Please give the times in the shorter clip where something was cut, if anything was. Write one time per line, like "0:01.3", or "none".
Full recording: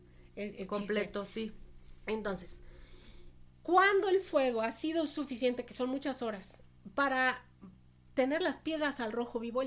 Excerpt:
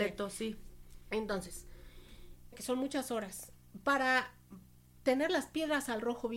0:02.5